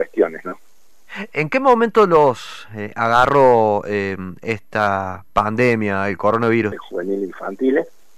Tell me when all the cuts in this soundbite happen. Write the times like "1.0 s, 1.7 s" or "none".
6.7 s